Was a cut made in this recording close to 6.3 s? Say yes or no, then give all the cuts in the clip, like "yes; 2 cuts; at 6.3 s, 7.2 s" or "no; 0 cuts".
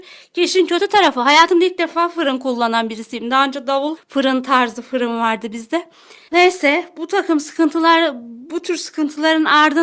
yes; 2 cuts; at 4.0 s, 6.3 s